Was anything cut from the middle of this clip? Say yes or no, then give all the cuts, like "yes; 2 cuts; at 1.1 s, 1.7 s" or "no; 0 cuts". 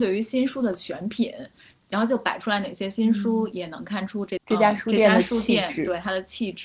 no; 0 cuts